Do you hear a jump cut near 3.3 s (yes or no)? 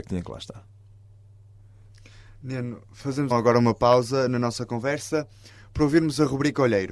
yes